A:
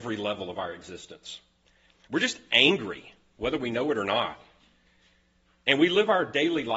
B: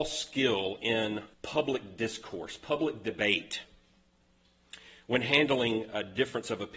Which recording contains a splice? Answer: B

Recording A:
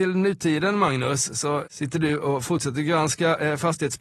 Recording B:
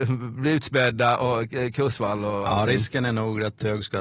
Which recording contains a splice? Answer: A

